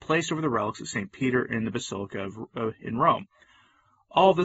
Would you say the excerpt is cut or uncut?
uncut